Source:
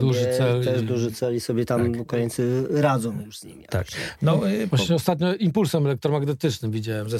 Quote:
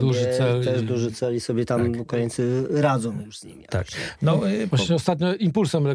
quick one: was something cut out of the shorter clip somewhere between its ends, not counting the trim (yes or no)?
no